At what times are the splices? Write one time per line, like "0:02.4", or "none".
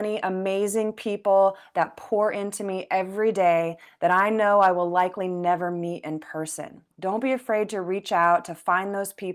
0:06.9

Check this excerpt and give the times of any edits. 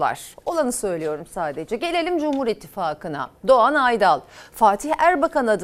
none

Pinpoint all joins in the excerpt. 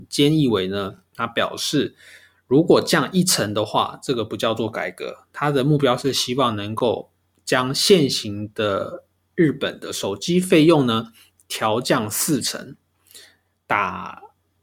none

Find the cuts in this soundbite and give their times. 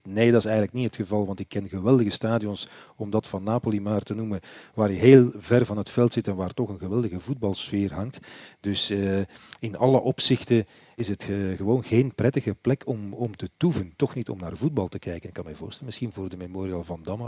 none

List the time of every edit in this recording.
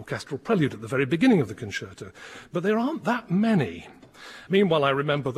0:04.5

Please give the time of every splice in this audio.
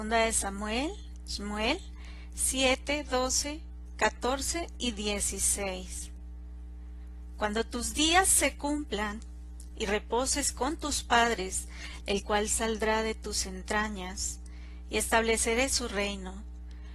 0:12.0

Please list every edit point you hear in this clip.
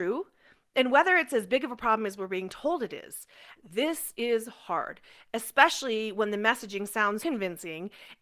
0:03.6
0:07.2

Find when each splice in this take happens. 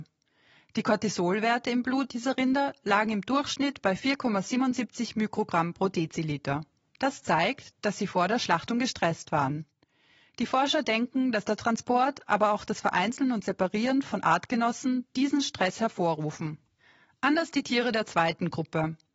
none

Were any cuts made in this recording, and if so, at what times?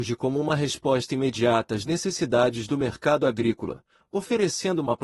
none

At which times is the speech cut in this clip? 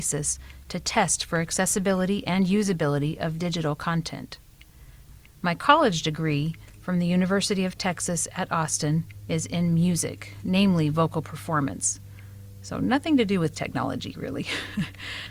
0:05.2

